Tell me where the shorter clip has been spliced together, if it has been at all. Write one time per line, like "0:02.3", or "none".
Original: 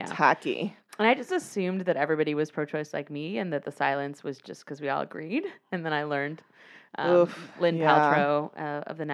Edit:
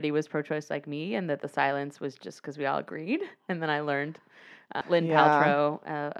0:04.8